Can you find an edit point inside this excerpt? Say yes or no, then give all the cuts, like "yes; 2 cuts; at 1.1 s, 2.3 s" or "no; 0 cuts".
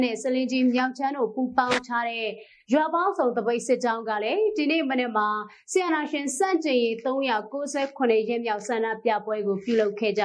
no; 0 cuts